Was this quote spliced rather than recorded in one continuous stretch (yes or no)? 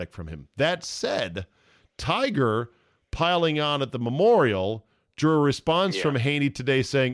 no